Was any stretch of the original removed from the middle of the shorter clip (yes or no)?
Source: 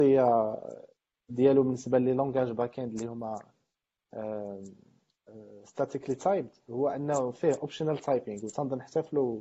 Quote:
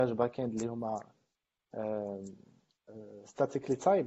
no